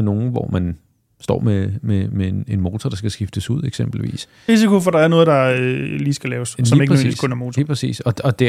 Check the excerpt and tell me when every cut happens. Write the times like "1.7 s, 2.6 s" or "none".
4.5 s